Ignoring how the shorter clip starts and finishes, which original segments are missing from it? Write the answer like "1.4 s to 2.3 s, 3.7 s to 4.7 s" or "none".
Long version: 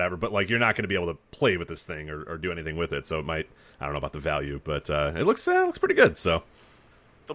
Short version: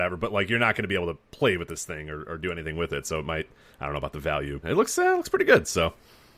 4.6 s to 5.1 s